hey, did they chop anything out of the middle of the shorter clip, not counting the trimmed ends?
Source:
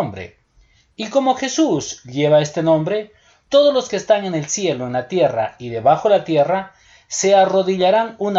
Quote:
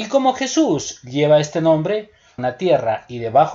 yes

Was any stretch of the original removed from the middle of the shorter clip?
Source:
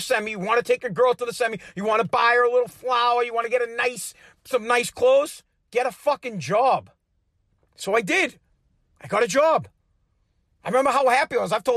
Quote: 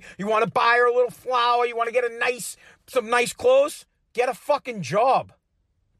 no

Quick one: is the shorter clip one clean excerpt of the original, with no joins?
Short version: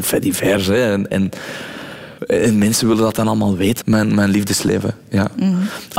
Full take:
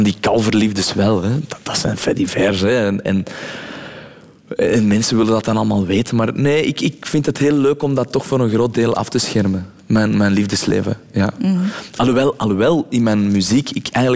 no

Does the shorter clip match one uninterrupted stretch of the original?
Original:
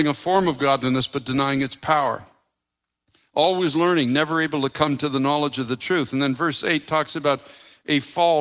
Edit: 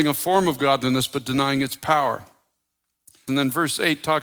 no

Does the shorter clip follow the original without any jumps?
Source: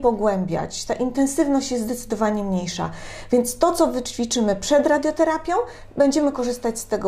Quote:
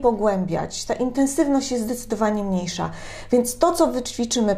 yes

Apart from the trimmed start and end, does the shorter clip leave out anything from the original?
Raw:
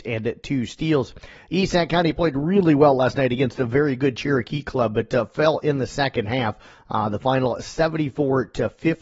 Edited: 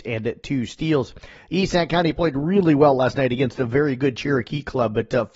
no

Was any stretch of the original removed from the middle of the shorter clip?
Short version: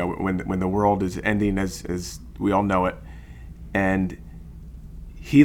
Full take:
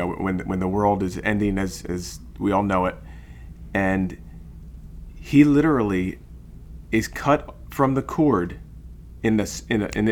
no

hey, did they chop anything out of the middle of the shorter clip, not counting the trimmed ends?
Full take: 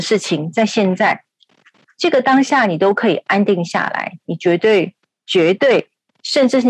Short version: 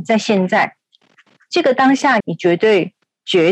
yes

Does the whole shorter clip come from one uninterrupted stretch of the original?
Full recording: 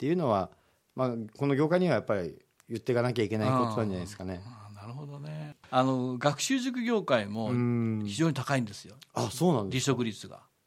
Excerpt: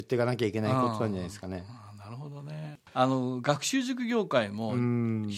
yes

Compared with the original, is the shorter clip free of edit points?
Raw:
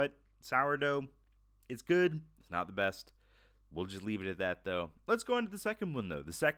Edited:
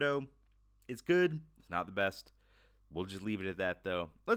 yes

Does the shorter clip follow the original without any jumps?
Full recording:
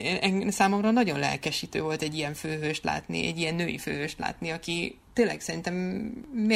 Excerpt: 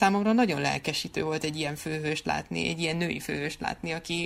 yes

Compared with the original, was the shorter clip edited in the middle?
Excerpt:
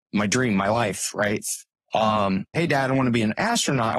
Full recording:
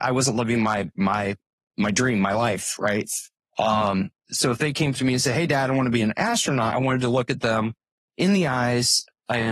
yes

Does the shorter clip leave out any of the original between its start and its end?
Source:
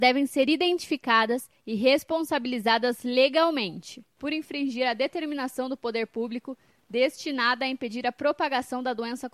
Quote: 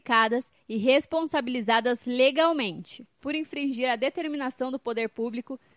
no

